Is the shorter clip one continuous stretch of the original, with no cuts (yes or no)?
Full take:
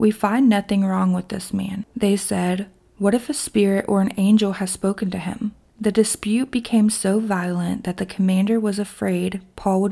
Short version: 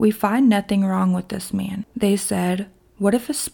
yes